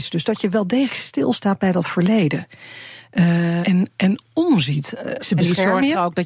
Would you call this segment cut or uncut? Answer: cut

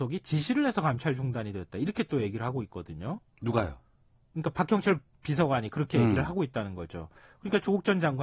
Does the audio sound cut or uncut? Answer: uncut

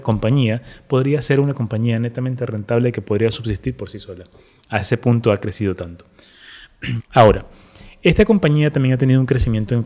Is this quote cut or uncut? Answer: cut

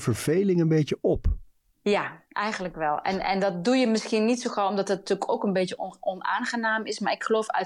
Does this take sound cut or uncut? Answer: uncut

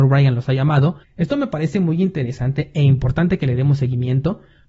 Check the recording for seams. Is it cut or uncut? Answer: cut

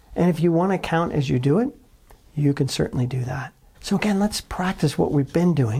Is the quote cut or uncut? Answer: cut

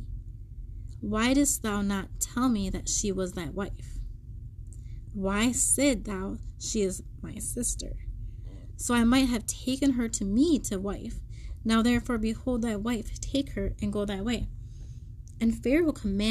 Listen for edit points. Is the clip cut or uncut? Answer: uncut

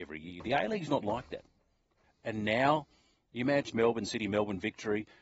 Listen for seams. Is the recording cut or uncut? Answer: cut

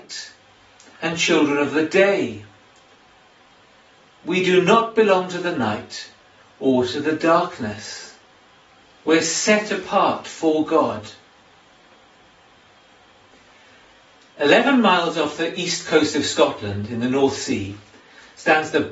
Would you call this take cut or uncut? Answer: cut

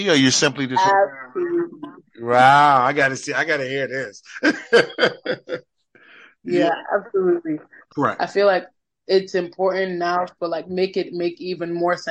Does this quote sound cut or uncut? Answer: cut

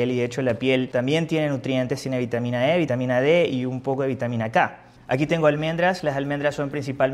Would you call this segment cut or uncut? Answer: cut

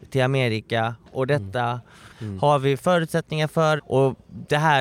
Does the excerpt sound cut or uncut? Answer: cut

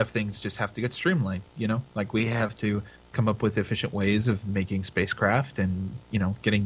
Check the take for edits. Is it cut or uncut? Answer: uncut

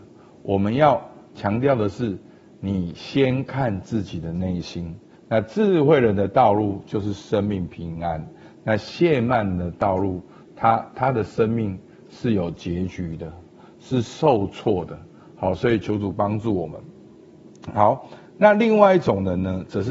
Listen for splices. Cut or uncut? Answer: cut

